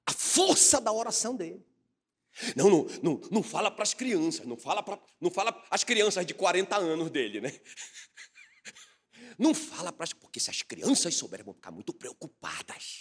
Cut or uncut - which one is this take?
uncut